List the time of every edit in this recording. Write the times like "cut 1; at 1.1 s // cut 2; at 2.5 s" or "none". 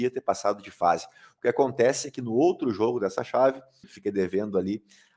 cut 1; at 3.8 s